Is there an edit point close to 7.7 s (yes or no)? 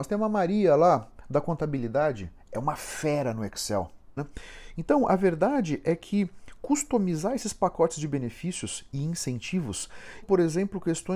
no